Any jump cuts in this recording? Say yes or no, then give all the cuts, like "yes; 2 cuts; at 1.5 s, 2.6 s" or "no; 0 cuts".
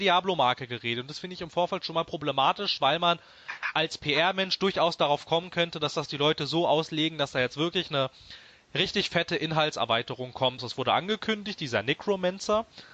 yes; 1 cut; at 10.6 s